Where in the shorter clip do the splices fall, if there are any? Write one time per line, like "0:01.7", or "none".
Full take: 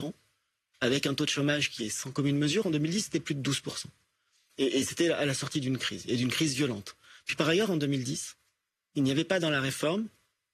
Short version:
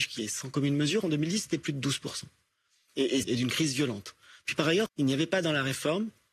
0:03.2
0:04.9